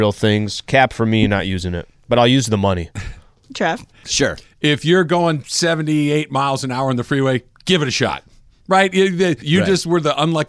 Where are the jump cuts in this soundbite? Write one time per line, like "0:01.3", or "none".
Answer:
0:04.0
0:09.4